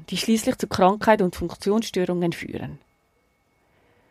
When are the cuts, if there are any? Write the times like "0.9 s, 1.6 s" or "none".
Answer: none